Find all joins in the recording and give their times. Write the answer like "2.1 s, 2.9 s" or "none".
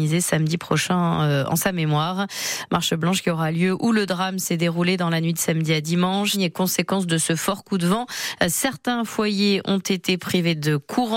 6.3 s